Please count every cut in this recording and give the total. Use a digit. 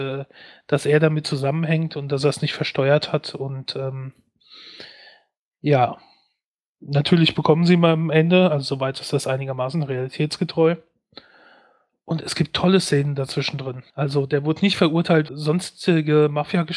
2